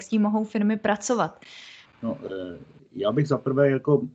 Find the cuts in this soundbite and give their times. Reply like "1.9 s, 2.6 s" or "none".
1.9 s

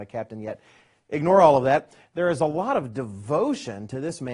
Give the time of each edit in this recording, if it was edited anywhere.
2.0 s

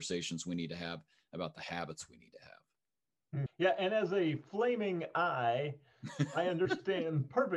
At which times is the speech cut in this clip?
3.5 s

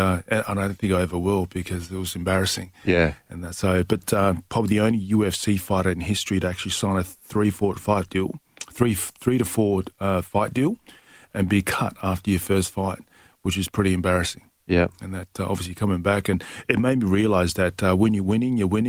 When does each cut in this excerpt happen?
none

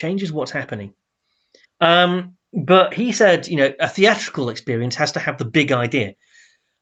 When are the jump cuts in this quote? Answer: 1.6 s

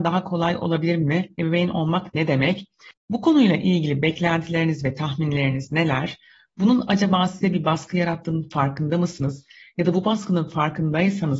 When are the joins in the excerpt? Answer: none

